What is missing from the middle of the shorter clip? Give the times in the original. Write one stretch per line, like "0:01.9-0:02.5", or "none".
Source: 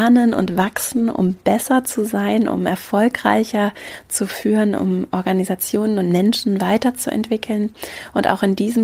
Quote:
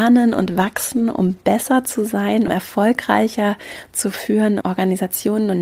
0:02.5-0:02.6
0:04.8-0:05.1